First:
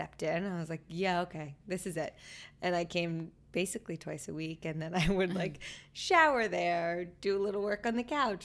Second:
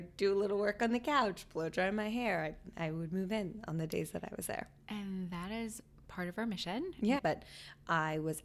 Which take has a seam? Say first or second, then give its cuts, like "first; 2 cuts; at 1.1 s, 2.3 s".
second; 1 cut; at 7.2 s